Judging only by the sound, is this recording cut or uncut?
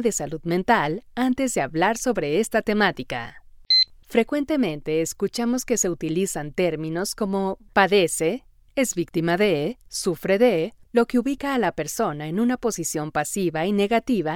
cut